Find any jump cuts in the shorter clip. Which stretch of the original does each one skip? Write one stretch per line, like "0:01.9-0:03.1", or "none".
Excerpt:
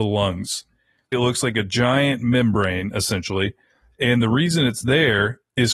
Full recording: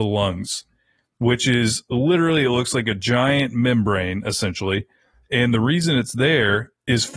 0:01.1-0:02.4

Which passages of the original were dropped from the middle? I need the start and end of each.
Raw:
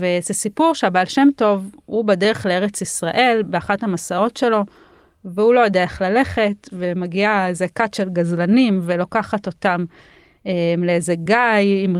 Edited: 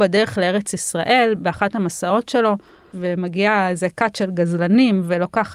0:05.0-0:06.7

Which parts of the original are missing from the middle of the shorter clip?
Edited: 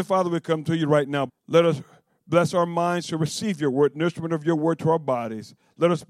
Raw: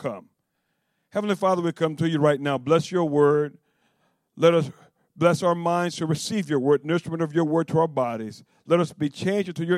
0:02.6-0:04.2

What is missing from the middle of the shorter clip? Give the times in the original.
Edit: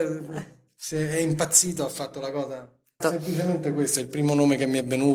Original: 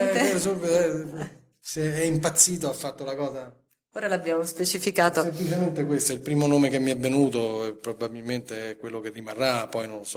0:03.8-0:05.1

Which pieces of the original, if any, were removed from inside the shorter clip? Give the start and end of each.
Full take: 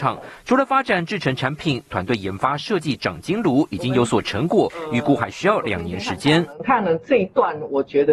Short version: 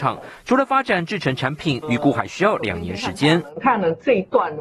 0:01.8-0:04.9

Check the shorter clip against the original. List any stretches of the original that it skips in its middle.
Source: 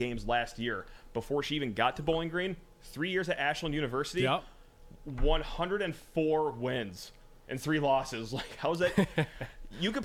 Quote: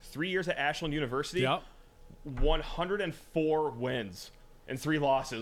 none

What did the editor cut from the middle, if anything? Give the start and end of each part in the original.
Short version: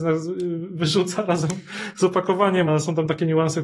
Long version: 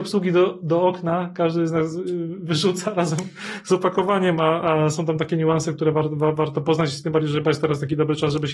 0:04.4-0:04.8

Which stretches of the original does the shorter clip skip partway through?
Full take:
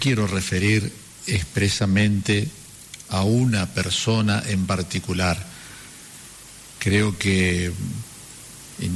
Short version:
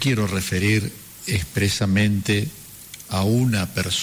none

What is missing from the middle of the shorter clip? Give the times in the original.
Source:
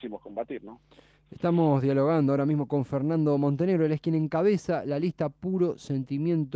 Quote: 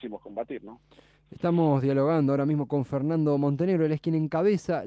none

